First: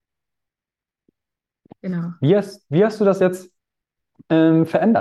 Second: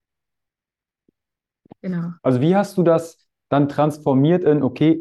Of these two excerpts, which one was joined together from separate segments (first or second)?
second